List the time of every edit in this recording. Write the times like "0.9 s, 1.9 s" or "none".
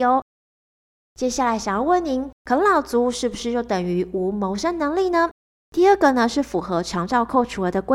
5.6 s